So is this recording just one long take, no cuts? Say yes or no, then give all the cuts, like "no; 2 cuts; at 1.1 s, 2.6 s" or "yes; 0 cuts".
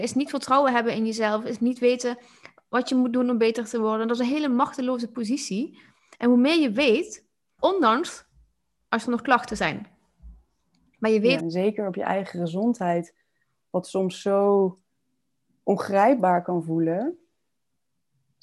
no; 2 cuts; at 7.6 s, 11.4 s